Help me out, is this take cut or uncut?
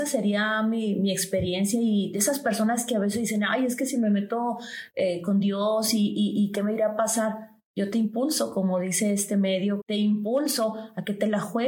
cut